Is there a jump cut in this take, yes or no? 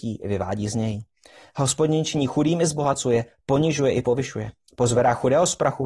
no